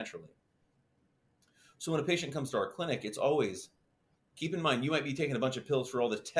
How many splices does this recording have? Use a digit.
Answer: 1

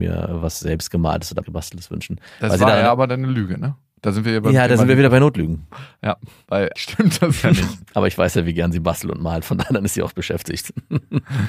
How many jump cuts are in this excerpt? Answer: 1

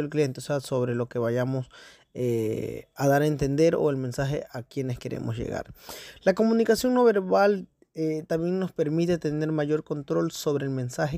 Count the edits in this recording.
0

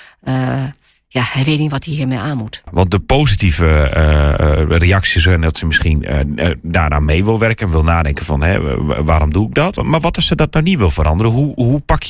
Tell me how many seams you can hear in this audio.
1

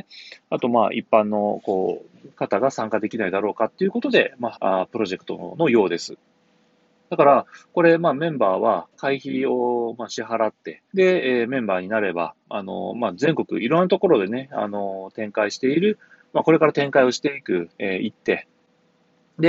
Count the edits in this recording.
3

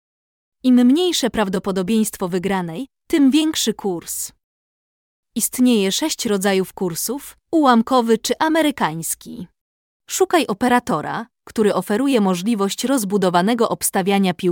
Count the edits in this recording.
2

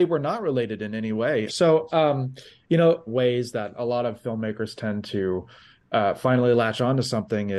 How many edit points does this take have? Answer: 2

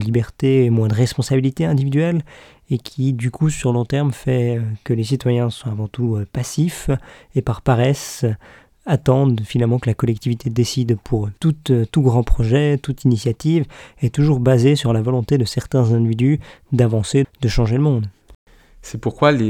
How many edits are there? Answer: 2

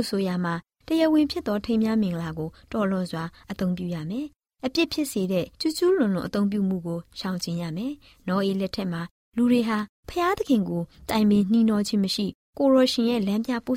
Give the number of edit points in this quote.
1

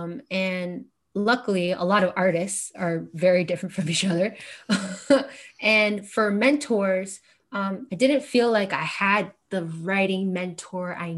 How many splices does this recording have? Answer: 2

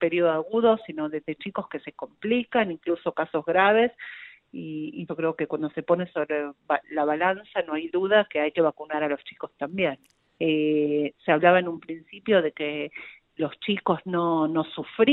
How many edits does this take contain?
2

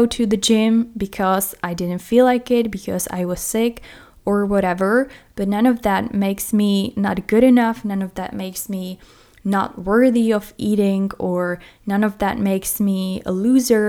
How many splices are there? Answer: 0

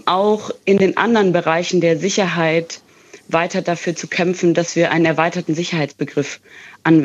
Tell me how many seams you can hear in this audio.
0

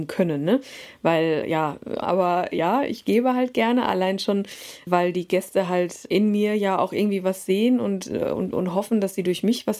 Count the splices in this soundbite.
1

